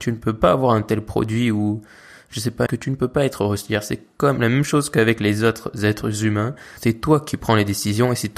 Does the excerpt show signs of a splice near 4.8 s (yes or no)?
no